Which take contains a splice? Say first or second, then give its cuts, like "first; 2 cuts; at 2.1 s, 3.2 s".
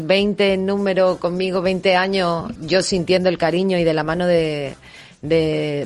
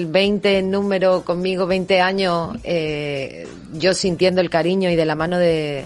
first; 1 cut; at 2.6 s